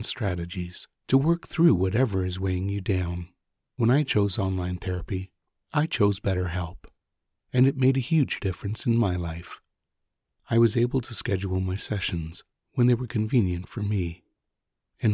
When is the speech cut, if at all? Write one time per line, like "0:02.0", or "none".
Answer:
none